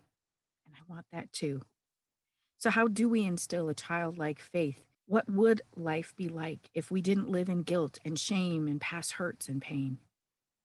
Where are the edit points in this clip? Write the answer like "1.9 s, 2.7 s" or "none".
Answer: 4.9 s